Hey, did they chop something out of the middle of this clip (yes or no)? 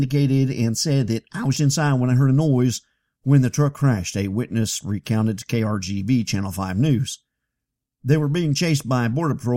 yes